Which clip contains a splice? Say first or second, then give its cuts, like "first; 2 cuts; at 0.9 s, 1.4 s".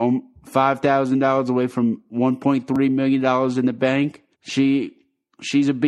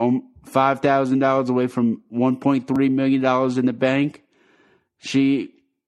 first; 1 cut; at 4.3 s